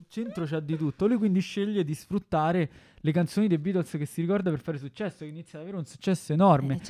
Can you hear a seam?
no; 0 cuts

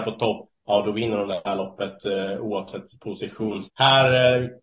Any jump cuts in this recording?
yes; 1 cut; at 3.6 s

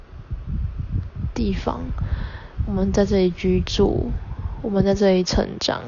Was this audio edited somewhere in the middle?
no; 0 cuts

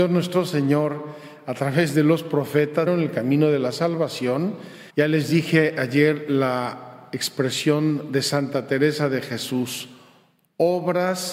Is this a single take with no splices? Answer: no; 2 cuts; at 2.9 s, 4.9 s

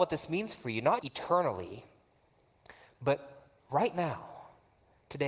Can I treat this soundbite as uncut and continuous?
no; 1 cut; at 1.0 s

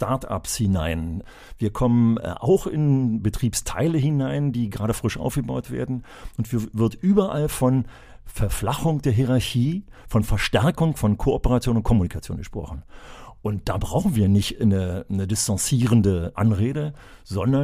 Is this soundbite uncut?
yes; 0 cuts

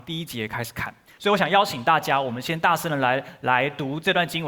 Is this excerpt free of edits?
no; 1 cut; at 1.2 s

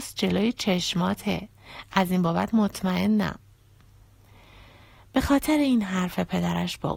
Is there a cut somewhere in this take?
yes; 1 cut; at 1.9 s

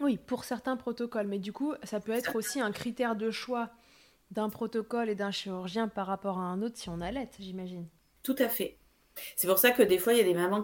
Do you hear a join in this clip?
no; 0 cuts

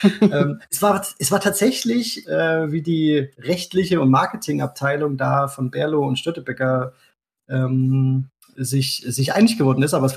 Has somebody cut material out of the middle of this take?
yes; 1 cut; at 2.2 s

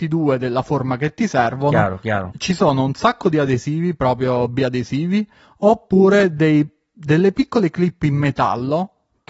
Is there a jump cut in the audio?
yes; 1 cut; at 2.3 s

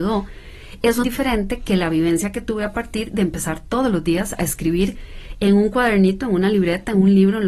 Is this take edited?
yes; 1 cut; at 1.0 s

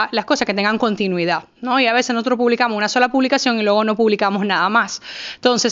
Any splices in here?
no; 0 cuts

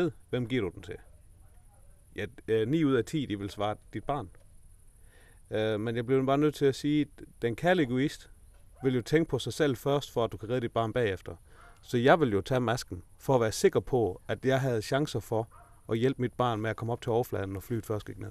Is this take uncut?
yes; 0 cuts

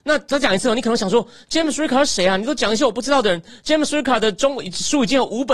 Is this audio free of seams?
yes; 0 cuts

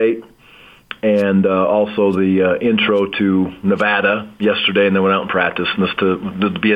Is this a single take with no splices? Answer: yes; 0 cuts

